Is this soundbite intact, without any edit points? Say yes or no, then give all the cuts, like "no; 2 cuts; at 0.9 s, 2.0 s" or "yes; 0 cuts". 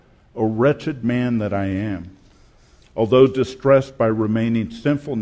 no; 1 cut; at 2.8 s